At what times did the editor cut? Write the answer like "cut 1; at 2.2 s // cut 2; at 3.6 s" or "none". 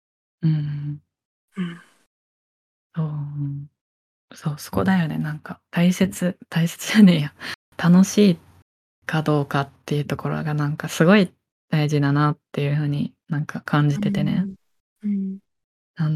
none